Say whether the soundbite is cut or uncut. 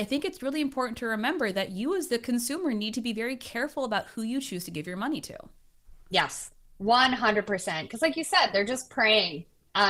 uncut